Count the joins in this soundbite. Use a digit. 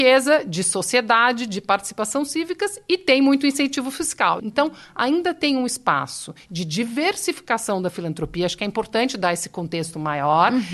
1